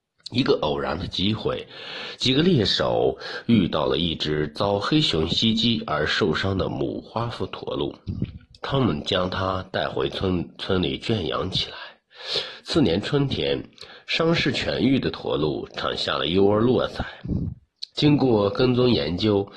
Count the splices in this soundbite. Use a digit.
1